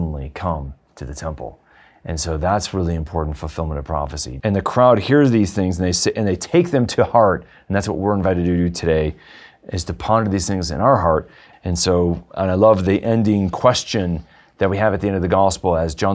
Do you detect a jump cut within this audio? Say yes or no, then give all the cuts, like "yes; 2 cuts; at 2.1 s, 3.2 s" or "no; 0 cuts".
yes; 2 cuts; at 4.4 s, 11.5 s